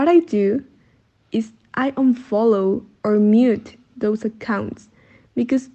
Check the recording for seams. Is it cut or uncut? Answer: cut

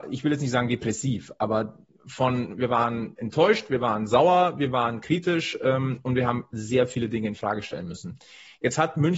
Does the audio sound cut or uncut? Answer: uncut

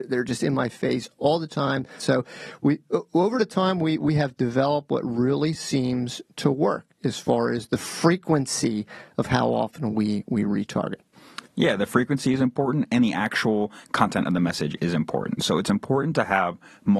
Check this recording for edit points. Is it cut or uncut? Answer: cut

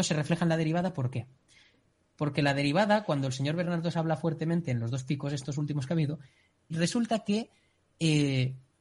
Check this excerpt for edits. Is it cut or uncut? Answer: cut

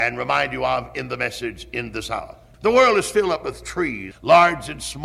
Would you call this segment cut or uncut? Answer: cut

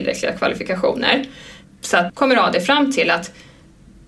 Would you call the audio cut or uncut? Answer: cut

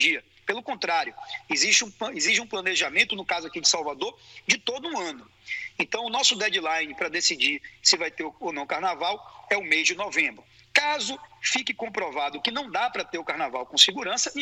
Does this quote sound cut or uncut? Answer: uncut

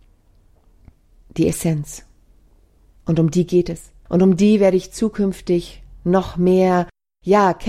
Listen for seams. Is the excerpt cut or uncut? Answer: uncut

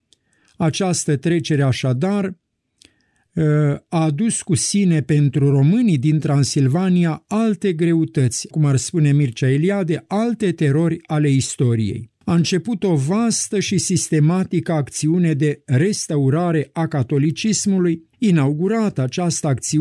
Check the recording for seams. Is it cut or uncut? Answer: cut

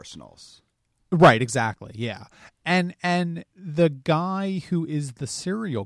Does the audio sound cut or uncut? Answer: cut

